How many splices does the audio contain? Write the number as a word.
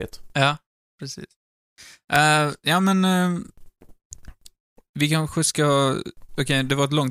zero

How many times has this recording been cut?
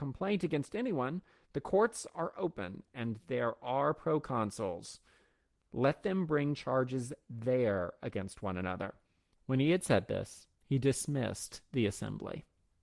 two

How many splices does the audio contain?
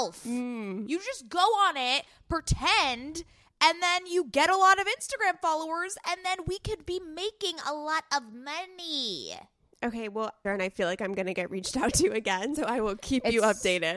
two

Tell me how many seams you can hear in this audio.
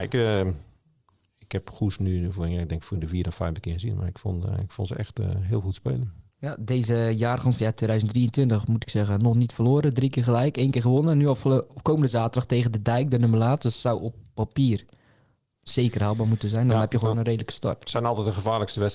zero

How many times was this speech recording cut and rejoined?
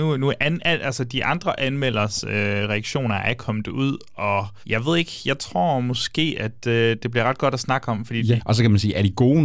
two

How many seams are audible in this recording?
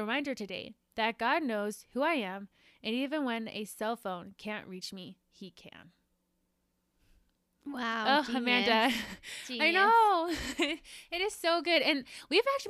zero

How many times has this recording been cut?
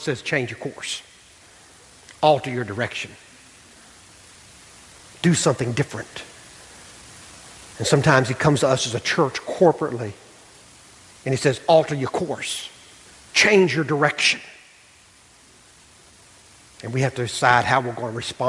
zero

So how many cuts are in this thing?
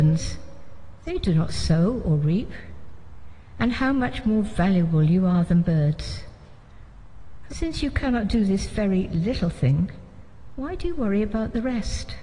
two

